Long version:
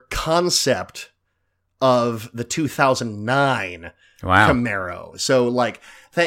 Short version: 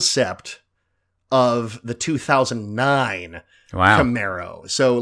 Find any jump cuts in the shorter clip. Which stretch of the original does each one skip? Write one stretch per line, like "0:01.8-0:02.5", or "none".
none